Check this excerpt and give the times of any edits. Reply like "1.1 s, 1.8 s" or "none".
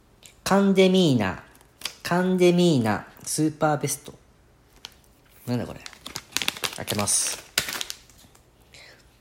none